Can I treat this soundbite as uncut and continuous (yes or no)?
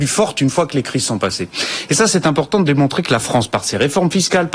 yes